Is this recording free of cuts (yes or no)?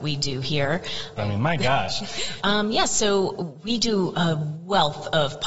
no